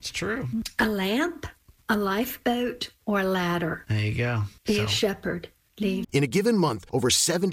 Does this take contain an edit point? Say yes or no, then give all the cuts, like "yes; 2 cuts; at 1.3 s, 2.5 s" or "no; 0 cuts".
yes; 2 cuts; at 4.6 s, 6.0 s